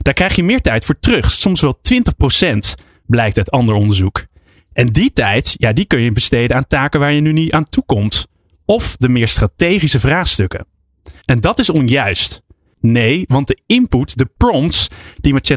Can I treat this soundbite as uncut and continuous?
no; 2 cuts; at 11.2 s, 12.7 s

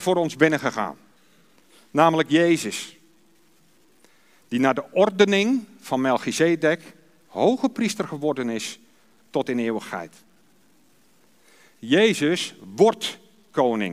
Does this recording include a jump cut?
no; 0 cuts

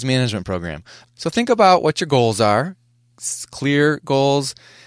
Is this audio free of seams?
no; 1 cut; at 1.0 s

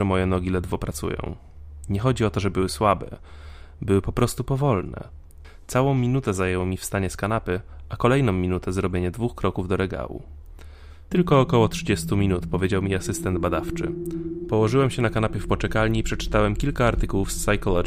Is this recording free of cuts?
no; 1 cut; at 11.1 s

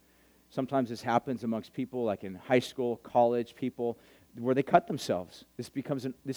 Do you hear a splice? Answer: no; 0 cuts

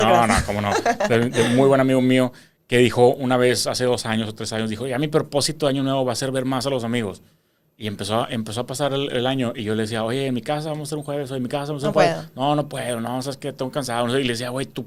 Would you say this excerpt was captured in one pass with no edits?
yes; 0 cuts

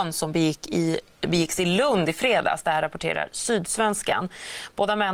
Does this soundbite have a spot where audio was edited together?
no; 0 cuts

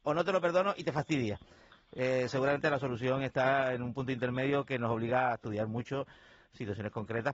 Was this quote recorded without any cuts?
yes; 0 cuts

